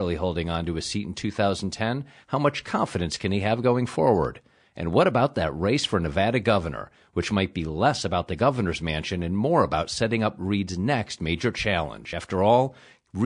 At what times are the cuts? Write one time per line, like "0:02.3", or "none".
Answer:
none